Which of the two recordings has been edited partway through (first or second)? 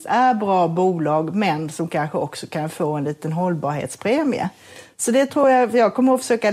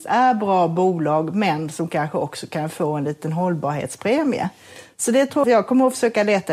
second